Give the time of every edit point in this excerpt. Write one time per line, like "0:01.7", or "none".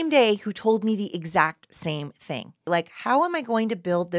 0:02.7